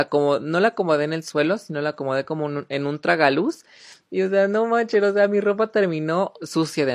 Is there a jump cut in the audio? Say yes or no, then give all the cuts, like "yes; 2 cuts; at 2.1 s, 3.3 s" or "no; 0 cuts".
no; 0 cuts